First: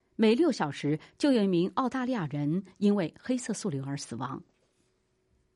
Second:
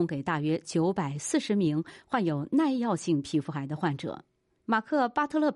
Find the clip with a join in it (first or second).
second